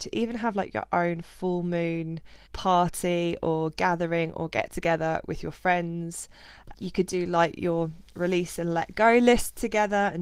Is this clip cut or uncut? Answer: cut